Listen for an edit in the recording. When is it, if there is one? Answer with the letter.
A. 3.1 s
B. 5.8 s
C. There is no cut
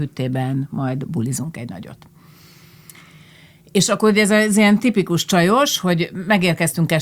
C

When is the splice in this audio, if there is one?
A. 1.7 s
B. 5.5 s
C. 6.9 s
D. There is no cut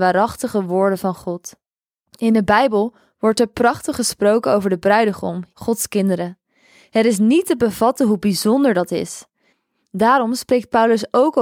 B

